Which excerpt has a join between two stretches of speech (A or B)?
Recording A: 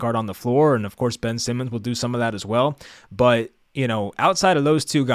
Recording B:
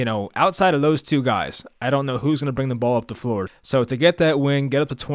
B